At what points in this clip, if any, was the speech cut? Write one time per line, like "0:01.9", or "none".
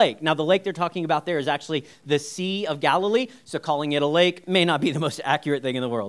none